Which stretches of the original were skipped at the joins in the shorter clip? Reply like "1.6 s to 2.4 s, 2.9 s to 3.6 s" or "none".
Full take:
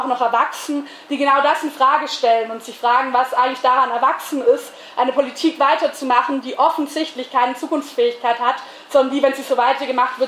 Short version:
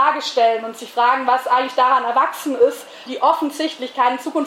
4.9 s to 6.4 s